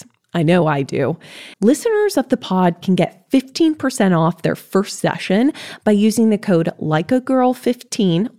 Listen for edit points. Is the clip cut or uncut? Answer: cut